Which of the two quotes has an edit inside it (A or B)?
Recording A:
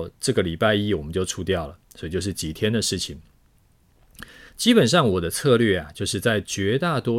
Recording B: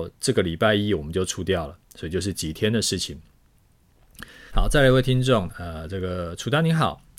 B